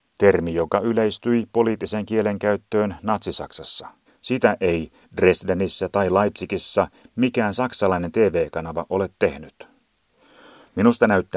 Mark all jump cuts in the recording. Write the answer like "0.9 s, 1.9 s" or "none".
4.1 s